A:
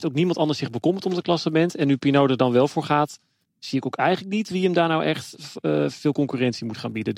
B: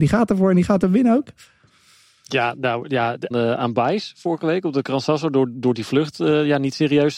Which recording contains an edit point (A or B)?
B